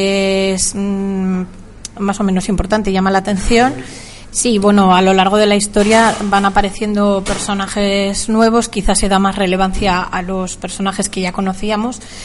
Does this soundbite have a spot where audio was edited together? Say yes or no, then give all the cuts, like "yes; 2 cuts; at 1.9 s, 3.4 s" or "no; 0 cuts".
yes; 1 cut; at 4.3 s